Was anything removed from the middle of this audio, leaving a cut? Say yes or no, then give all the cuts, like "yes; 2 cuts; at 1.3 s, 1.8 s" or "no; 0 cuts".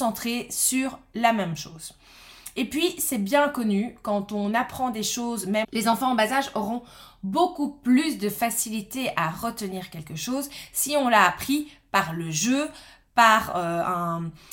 no; 0 cuts